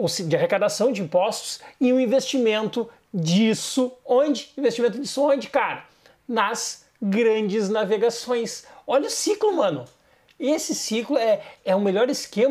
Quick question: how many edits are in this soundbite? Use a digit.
1